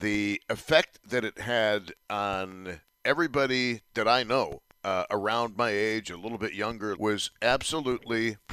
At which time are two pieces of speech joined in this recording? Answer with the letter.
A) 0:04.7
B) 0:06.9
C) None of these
B